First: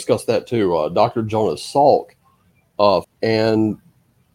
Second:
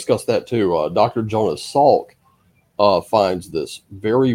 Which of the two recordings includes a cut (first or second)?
first